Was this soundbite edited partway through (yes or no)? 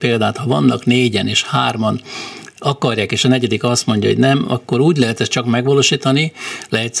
no